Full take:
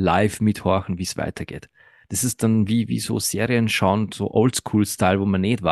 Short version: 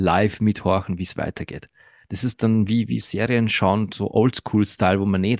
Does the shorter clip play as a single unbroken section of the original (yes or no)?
no